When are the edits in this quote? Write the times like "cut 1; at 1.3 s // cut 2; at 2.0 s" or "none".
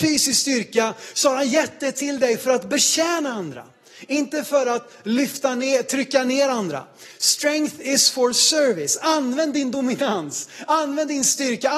none